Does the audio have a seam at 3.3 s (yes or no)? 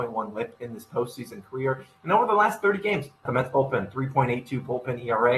yes